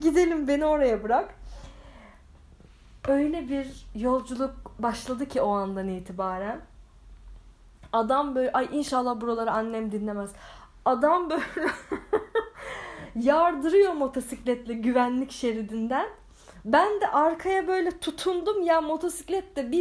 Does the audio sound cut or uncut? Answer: uncut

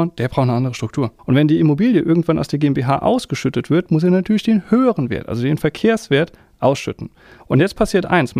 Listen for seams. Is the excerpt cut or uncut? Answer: cut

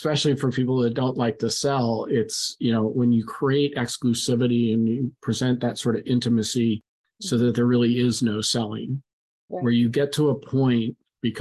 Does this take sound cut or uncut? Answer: cut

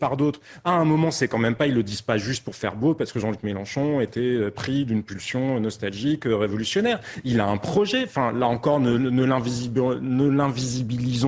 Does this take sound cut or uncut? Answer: uncut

